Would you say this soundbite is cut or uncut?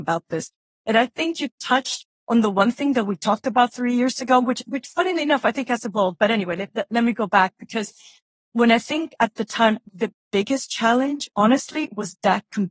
uncut